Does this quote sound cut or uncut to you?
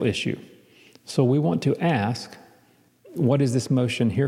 uncut